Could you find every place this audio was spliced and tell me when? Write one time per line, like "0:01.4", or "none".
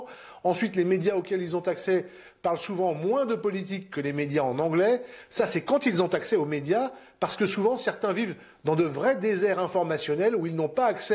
none